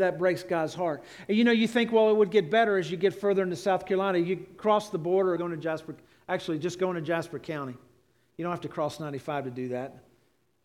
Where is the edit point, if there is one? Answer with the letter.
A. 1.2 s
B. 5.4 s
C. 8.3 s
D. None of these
B